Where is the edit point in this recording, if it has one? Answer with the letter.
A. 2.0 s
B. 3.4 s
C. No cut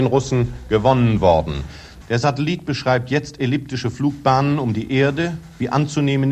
A